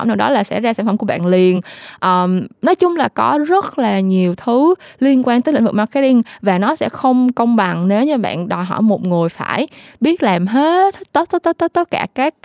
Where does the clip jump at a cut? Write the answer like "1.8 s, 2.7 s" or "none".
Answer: none